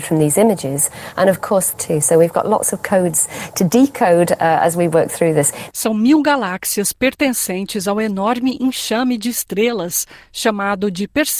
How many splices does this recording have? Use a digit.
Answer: 2